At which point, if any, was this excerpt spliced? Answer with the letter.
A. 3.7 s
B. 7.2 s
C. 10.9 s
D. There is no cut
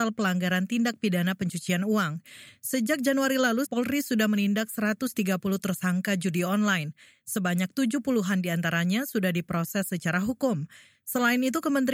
A